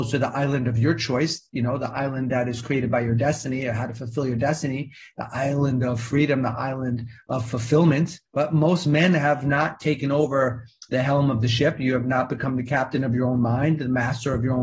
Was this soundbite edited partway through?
yes; 1 cut; at 8.3 s

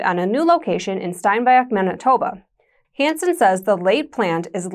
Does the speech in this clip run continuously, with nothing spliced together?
no; 1 cut; at 2.8 s

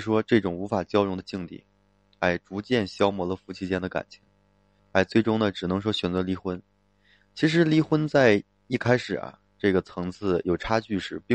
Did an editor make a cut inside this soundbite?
yes; 1 cut; at 4.8 s

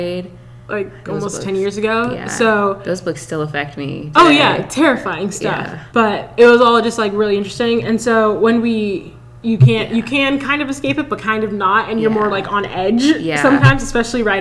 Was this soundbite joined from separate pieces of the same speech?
yes; 2 cuts; at 5.9 s, 9.4 s

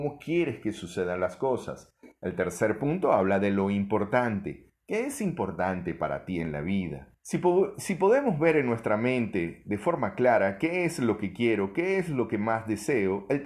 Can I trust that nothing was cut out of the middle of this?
no; 1 cut; at 7.2 s

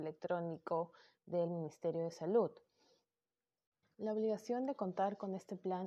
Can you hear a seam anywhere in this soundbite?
yes; 1 cut; at 3.8 s

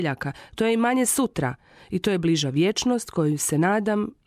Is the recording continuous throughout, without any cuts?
yes; 0 cuts

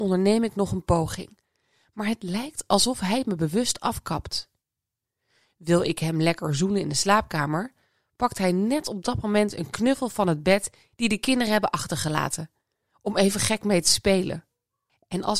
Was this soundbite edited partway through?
no; 0 cuts

